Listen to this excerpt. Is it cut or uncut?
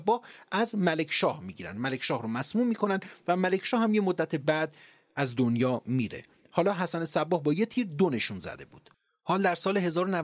uncut